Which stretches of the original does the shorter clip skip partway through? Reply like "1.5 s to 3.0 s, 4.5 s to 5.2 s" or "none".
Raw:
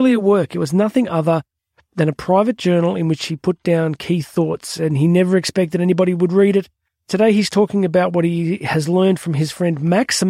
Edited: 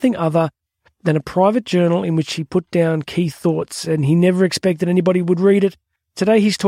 none